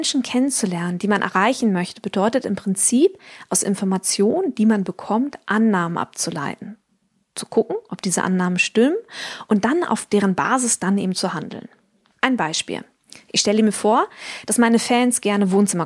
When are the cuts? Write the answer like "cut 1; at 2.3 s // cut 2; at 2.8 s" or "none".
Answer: none